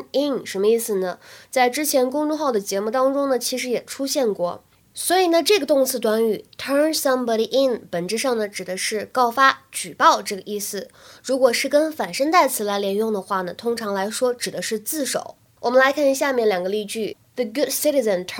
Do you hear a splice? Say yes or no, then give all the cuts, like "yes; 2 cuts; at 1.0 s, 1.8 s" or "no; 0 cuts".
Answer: yes; 1 cut; at 4.8 s